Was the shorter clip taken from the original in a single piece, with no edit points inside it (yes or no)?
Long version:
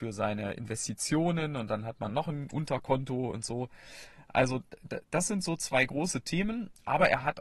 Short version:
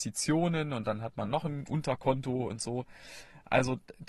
yes